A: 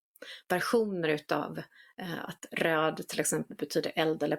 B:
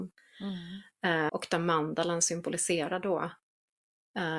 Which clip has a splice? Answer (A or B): B